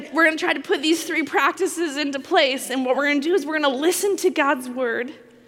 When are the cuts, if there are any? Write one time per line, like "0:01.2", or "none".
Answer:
none